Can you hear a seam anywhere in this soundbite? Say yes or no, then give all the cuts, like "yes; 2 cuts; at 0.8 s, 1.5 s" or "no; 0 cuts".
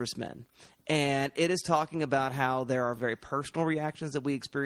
yes; 1 cut; at 3.0 s